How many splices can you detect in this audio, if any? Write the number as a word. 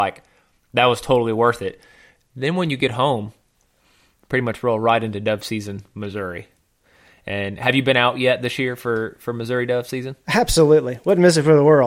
zero